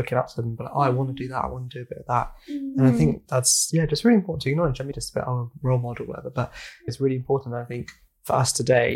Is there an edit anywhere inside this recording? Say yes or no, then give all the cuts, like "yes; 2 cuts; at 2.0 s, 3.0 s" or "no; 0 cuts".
yes; 2 cuts; at 4.9 s, 6.9 s